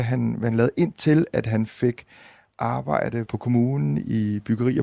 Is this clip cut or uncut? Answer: cut